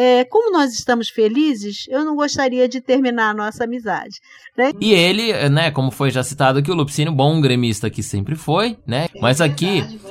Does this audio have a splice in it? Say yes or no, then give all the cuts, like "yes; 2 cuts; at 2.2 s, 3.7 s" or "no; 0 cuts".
yes; 2 cuts; at 4.7 s, 9.1 s